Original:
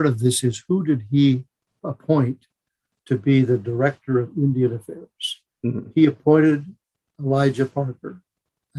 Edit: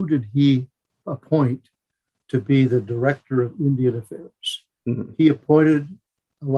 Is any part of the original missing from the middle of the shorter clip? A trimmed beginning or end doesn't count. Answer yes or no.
no